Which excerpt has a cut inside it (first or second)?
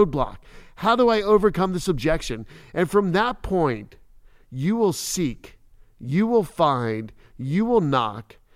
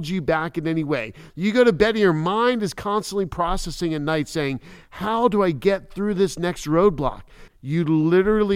second